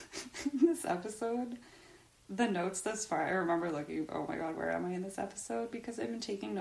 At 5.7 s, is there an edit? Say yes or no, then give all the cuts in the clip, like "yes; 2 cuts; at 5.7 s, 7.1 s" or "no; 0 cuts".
no; 1 cut; at 4.1 s